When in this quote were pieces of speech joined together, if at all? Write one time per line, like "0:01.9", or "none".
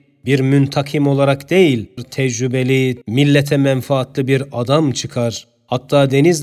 0:02.0
0:03.0